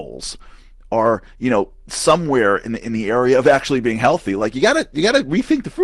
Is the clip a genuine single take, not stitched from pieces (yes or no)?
yes